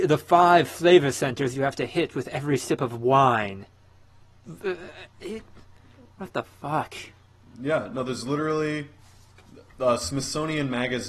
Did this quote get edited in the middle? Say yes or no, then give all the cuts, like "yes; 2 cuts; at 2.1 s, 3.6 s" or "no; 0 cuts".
no; 0 cuts